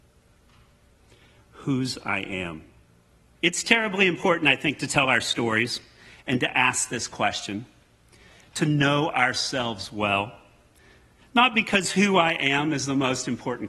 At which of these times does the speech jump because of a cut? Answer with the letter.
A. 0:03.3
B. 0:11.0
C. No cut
A